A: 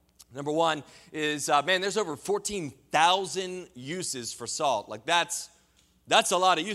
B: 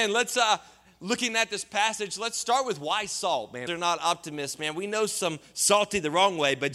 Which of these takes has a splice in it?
B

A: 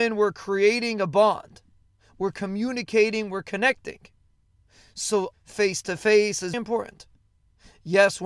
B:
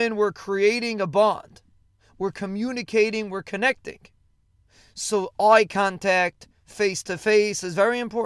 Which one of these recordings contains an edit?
A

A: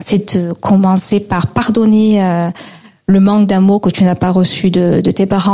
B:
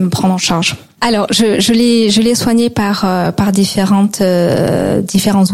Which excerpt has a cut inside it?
B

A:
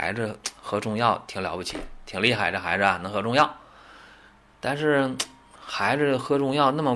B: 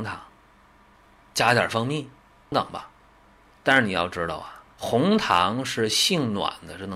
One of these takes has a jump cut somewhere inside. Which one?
B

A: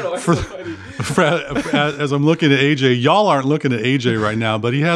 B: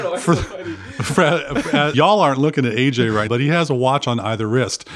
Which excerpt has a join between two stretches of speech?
B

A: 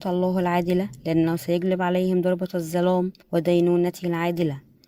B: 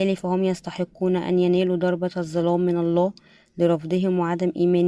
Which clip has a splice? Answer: A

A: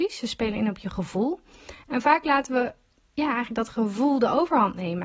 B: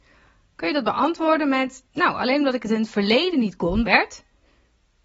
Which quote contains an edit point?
B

